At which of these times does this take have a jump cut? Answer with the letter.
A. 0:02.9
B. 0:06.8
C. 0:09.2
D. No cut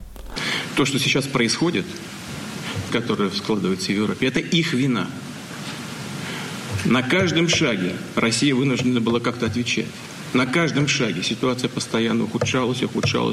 A